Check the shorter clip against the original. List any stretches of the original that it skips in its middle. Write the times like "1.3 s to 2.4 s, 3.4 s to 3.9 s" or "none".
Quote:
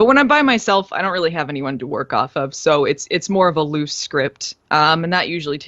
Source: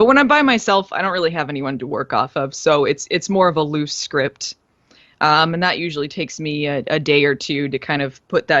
4.6 s to 5.1 s